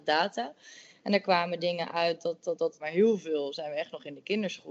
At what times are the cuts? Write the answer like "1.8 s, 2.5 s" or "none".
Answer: 2.8 s

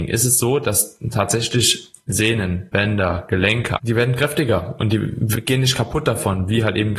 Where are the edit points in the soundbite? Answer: 3.8 s

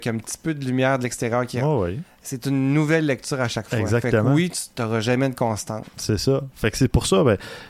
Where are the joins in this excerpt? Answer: none

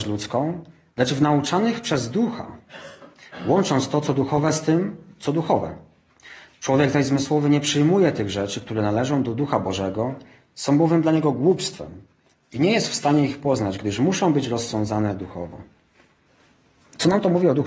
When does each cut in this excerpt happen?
none

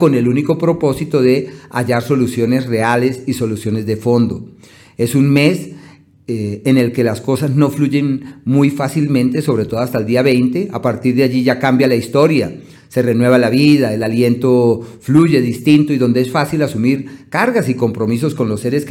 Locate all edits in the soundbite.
none

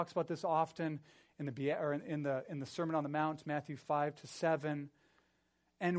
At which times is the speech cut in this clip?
none

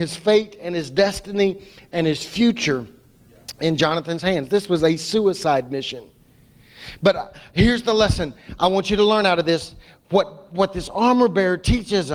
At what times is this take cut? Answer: none

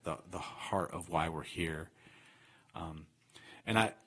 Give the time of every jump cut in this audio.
none

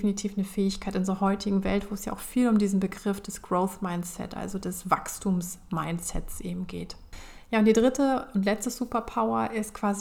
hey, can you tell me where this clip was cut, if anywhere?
none

